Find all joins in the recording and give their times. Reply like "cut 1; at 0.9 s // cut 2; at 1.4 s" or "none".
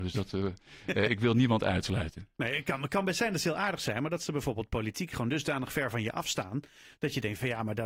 none